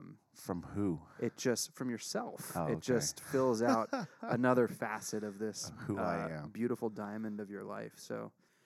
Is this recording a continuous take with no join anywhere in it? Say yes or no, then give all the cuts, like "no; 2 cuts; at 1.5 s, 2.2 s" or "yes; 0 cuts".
yes; 0 cuts